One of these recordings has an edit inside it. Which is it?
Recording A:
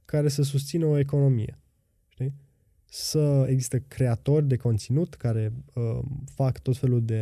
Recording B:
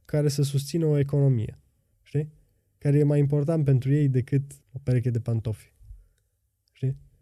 B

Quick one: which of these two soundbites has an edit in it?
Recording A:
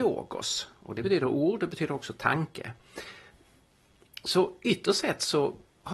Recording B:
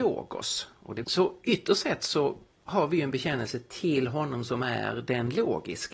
B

